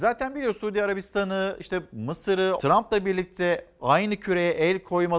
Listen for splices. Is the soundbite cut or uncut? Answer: cut